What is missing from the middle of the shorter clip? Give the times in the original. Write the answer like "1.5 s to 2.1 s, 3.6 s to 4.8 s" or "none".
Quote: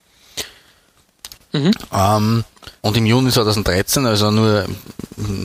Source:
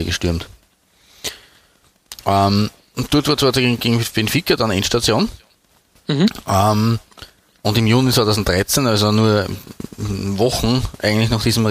2.2 s to 5.9 s, 7.3 s to 7.6 s